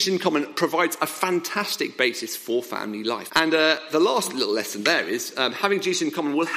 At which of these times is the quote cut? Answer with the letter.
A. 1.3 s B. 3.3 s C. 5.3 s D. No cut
B